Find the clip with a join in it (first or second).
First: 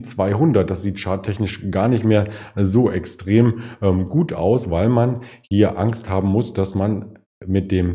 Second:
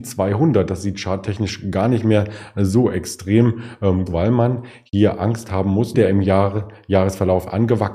second